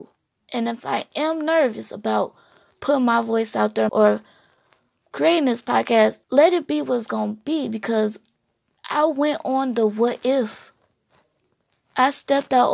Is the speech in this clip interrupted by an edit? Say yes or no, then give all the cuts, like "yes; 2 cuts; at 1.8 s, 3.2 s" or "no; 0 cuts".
yes; 2 cuts; at 3.9 s, 6.2 s